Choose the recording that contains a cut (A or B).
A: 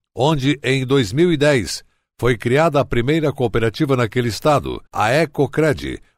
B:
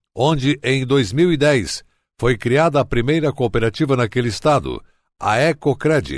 A